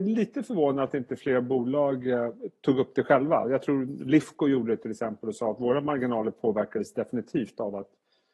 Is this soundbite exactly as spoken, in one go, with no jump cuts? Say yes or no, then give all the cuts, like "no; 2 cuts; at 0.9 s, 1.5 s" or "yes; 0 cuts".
yes; 0 cuts